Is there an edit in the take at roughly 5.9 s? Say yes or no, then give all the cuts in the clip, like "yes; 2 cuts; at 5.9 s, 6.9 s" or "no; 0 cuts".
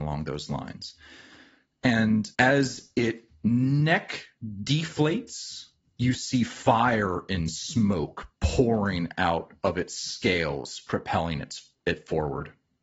yes; 2 cuts; at 2.3 s, 5.9 s